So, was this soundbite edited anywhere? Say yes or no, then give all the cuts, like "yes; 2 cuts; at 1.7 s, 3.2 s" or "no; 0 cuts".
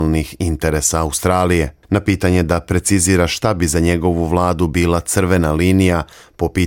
yes; 1 cut; at 1.8 s